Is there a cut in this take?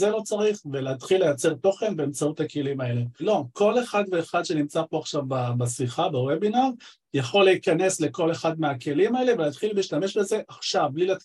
yes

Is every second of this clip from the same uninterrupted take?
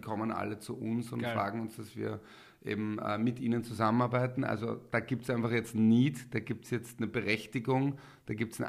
yes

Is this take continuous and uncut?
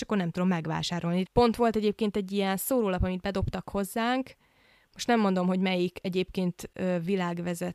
no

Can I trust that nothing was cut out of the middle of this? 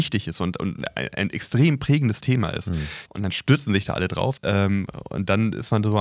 no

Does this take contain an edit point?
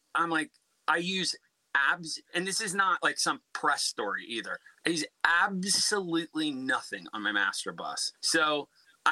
yes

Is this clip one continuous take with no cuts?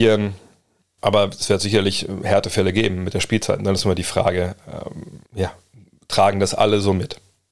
no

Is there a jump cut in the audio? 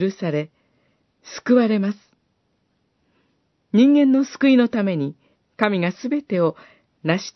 yes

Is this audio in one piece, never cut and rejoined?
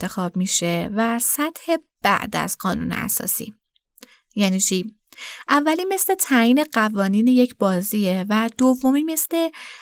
yes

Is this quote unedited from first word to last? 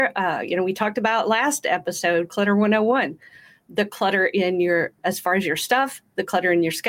yes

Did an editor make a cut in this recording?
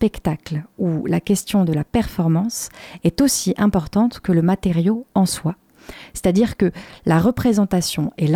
no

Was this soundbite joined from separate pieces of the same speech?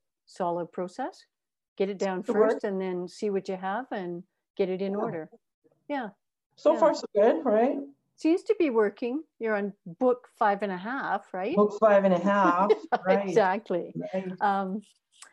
no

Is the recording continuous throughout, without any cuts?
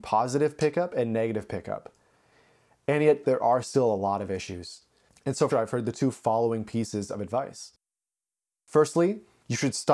no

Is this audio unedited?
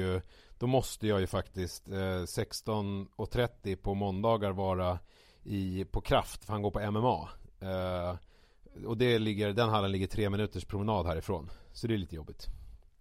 yes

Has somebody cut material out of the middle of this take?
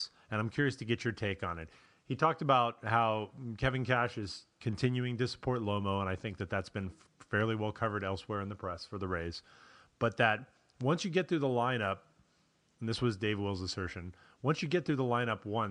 no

